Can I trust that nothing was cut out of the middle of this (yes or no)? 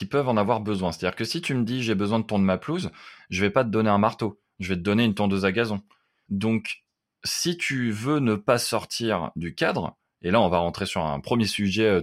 no